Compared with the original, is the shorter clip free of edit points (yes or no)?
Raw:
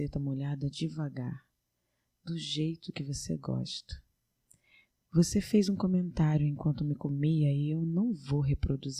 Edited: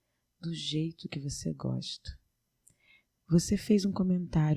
yes